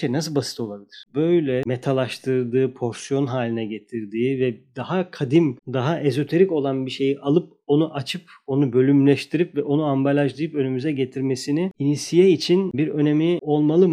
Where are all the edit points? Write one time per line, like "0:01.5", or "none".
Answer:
0:01.1